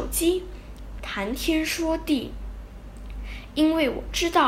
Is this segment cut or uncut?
cut